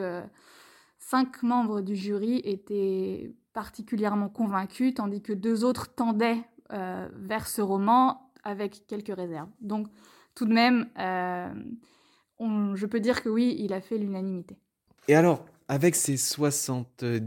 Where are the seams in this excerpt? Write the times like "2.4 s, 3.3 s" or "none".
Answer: none

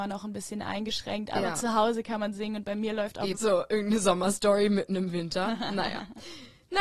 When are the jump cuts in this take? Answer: 3.3 s

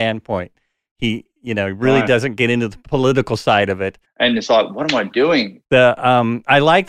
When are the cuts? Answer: 4.0 s, 5.6 s

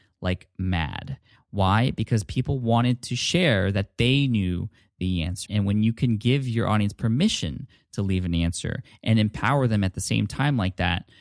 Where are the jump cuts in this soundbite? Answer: 5.5 s

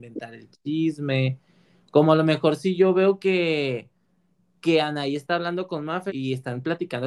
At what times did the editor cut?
6.1 s

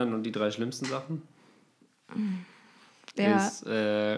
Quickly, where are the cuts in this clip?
3.1 s

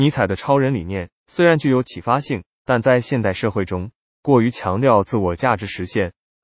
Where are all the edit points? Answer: none

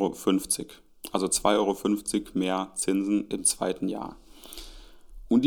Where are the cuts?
none

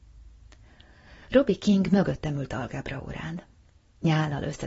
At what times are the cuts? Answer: none

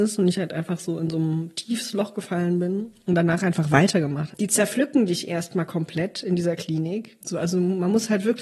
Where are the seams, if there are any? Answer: 4.3 s, 7.2 s

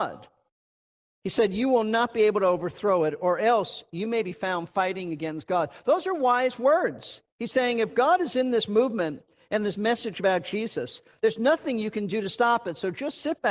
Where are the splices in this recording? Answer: none

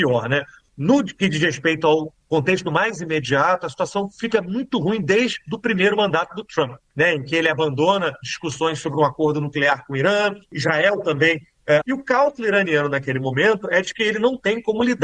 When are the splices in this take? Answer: 11.8 s

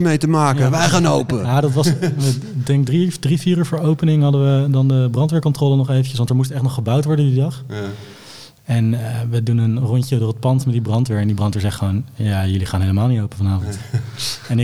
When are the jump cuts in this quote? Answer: none

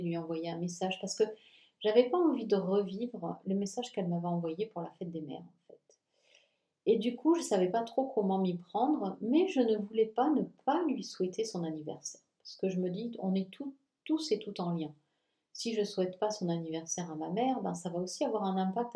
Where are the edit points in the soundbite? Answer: none

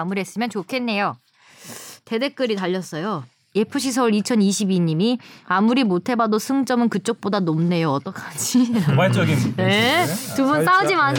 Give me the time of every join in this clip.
none

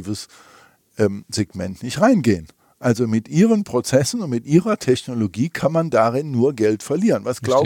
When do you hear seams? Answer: none

